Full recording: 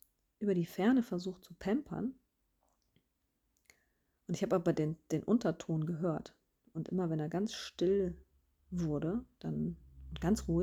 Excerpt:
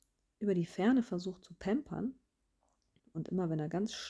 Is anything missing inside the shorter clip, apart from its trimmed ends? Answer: yes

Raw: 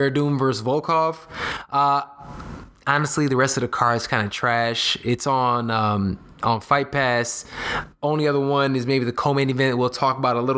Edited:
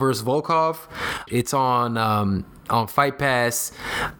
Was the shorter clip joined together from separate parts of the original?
yes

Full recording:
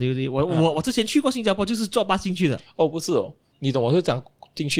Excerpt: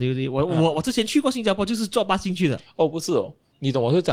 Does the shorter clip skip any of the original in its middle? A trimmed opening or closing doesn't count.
no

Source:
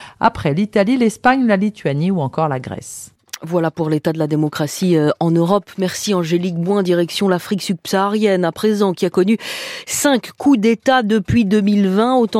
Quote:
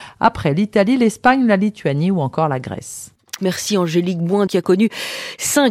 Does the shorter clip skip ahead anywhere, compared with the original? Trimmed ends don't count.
yes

